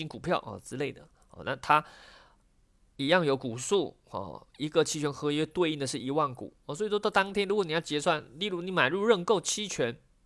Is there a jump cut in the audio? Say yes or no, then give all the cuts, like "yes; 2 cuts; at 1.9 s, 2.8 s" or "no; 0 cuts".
no; 0 cuts